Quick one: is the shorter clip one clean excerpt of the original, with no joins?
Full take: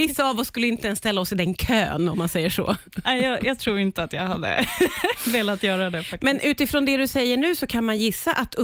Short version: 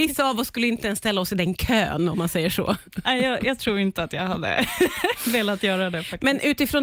yes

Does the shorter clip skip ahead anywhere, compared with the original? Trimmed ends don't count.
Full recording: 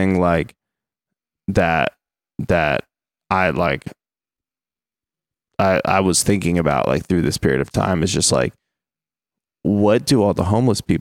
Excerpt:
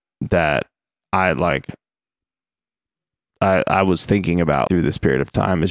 yes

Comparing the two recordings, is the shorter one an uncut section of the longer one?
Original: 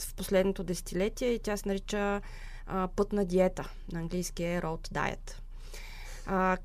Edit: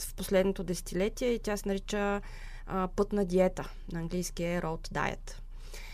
yes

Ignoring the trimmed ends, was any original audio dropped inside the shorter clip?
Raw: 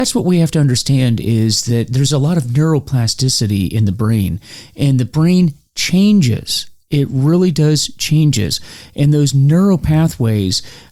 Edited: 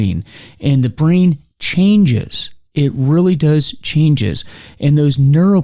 no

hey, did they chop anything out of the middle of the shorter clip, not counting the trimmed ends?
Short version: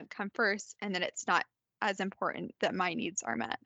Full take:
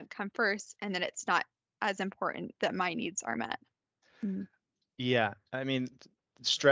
no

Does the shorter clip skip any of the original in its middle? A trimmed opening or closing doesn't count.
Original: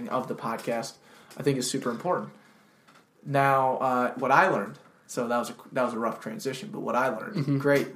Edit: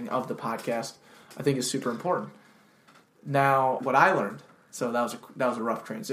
yes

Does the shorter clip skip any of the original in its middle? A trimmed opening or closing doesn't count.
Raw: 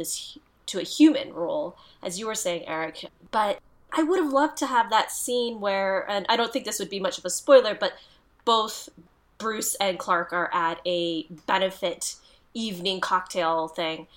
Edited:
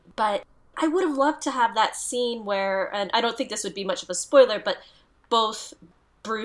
no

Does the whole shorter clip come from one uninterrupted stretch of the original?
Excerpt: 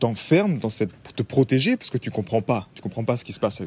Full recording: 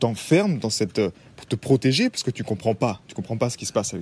no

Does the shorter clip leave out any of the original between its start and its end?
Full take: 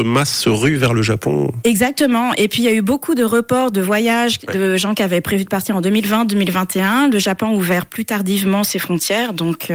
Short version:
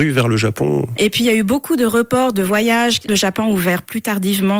yes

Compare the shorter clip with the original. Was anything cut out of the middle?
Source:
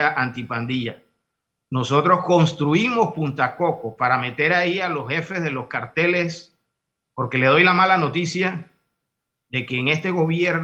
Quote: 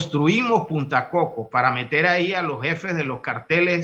no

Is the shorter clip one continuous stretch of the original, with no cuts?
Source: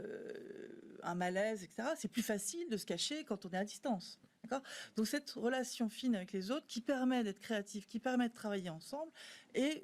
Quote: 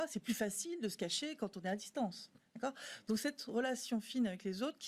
yes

